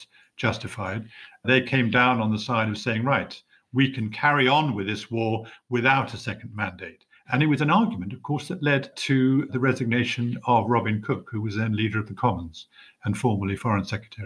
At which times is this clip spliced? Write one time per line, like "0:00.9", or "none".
none

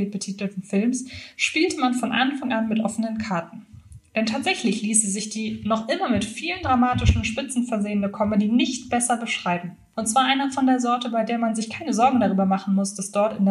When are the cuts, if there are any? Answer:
0:09.9

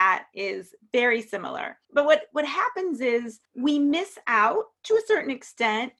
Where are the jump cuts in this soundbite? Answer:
0:01.8
0:03.5

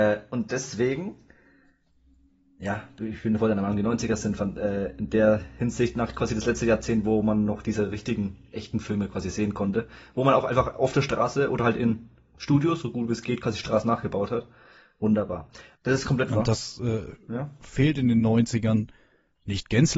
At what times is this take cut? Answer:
0:15.8

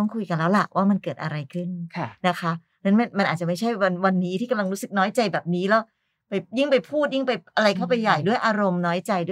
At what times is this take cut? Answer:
none

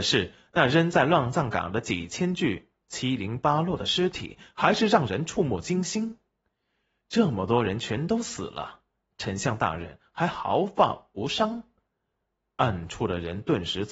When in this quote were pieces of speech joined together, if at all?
none

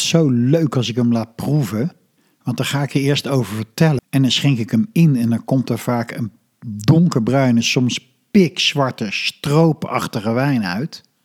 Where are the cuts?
0:04.0

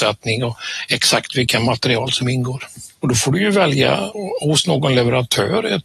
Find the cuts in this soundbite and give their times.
0:03.0

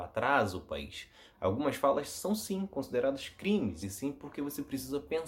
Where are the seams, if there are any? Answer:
0:01.3
0:03.8

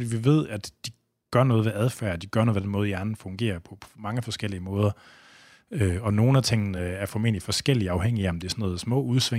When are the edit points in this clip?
none

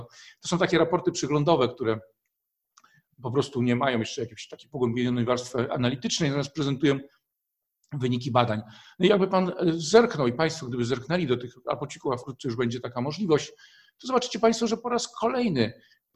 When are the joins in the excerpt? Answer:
none

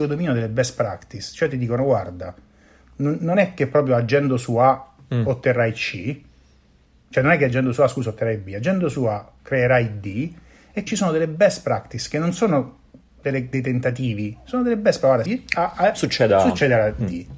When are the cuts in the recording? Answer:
0:10.9
0:15.2

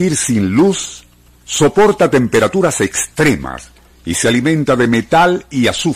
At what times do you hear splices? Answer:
none

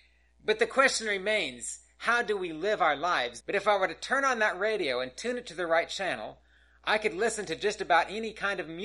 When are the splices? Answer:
0:03.4

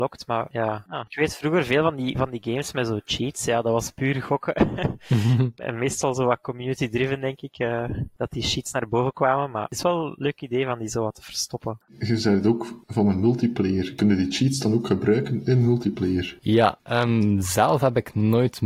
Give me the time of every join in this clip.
0:11.9

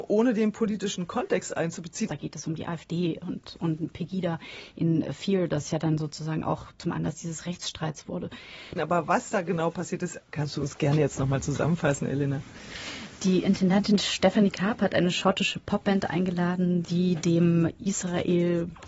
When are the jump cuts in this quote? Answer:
0:02.1
0:08.8
0:16.8

